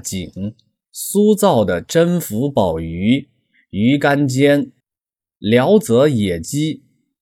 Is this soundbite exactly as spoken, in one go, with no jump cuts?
yes; 0 cuts

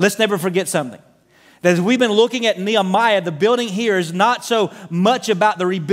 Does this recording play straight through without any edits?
yes; 0 cuts

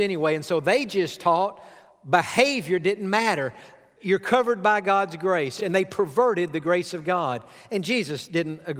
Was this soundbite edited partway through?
no; 0 cuts

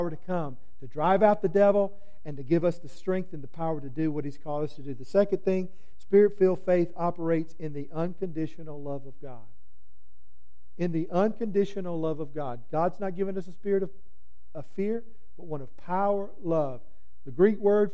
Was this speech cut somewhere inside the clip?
no; 0 cuts

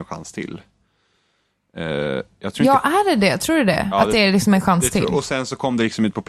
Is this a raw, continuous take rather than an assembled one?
yes; 0 cuts

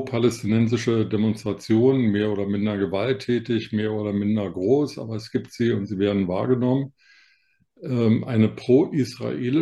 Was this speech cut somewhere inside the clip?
no; 0 cuts

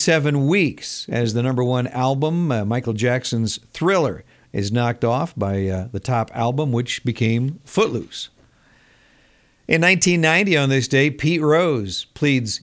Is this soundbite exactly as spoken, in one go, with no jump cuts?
yes; 0 cuts

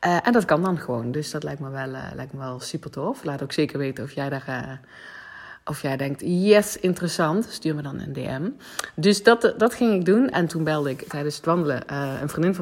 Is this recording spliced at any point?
yes; 1 cut; at 10.3 s

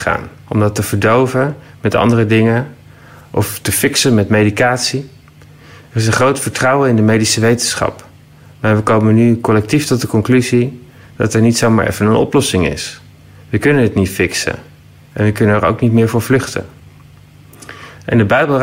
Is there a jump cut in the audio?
no; 0 cuts

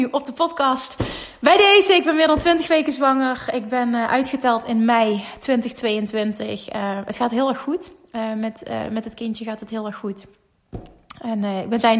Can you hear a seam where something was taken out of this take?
no; 0 cuts

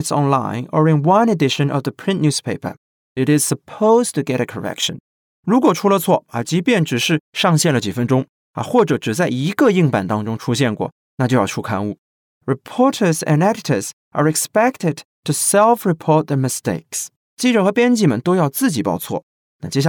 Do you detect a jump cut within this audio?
no; 0 cuts

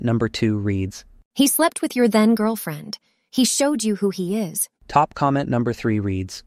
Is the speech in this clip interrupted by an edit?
yes; 1 cut; at 4.8 s

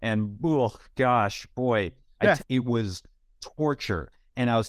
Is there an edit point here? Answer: yes; 1 cut; at 2.4 s

